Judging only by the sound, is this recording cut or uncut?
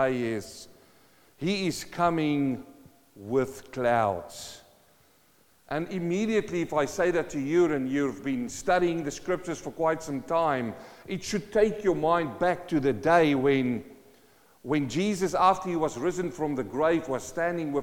uncut